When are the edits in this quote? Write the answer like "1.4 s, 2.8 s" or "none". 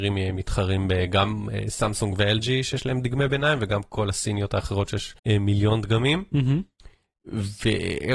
5.2 s